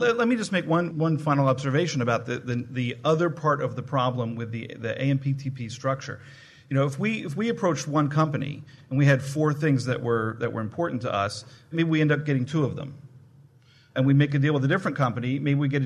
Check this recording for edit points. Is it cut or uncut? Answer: cut